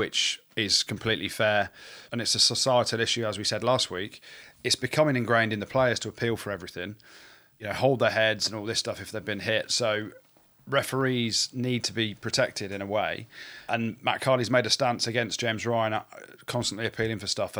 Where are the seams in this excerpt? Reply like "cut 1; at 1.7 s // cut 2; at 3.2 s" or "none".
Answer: none

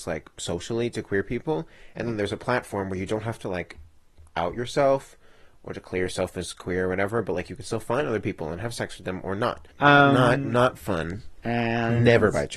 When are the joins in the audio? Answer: cut 1; at 9.7 s // cut 2; at 11.4 s

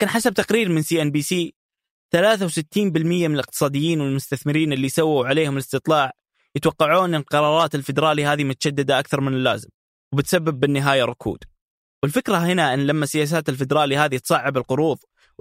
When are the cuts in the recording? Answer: none

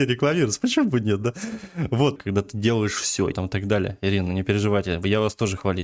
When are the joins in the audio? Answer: cut 1; at 2.2 s // cut 2; at 3.3 s

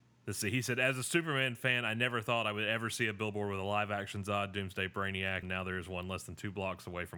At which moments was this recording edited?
cut 1; at 5.4 s

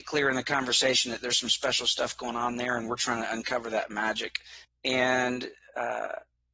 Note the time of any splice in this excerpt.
cut 1; at 4.6 s

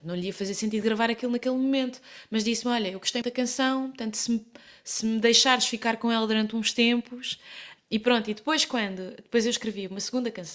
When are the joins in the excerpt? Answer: cut 1; at 3.2 s // cut 2; at 7.8 s

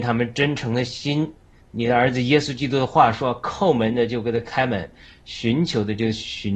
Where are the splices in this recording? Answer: cut 1; at 1.6 s

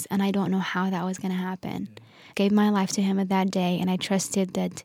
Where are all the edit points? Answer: cut 1; at 2.3 s

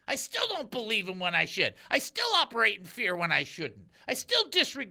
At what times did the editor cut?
none

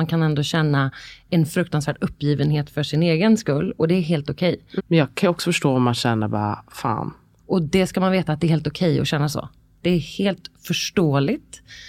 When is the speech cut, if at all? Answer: cut 1; at 4.8 s // cut 2; at 7.4 s

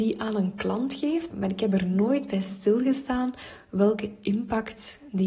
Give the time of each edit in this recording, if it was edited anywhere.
cut 1; at 1.3 s

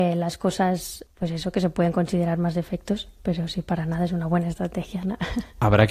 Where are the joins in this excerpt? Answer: cut 1; at 1.1 s

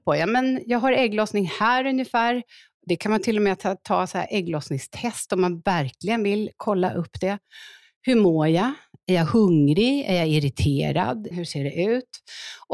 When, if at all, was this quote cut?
cut 1; at 11.3 s

